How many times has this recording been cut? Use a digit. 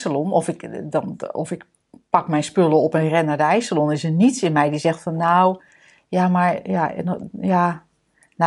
0